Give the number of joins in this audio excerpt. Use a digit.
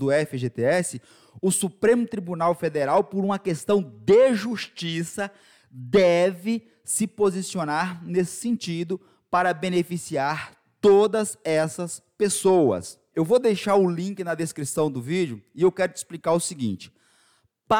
1